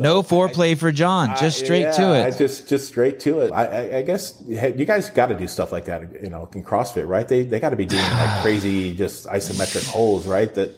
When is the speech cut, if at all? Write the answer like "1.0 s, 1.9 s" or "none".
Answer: 3.5 s

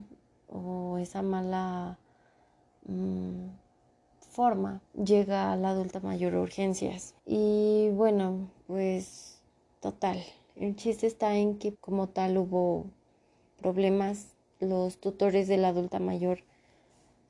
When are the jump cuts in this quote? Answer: 4.9 s, 7.2 s, 11.7 s

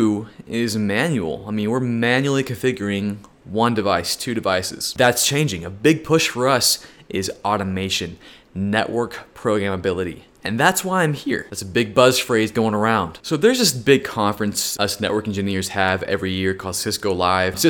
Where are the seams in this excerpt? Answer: none

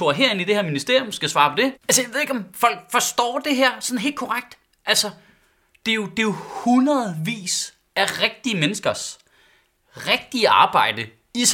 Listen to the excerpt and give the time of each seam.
1.7 s

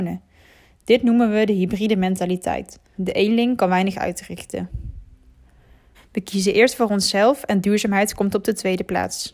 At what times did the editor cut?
3.0 s, 5.9 s

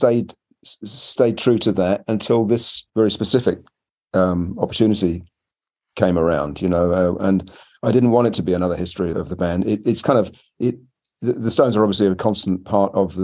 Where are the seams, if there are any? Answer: 2.9 s, 9.1 s

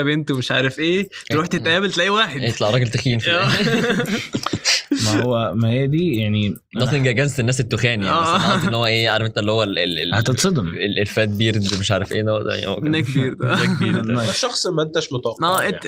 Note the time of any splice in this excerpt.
none

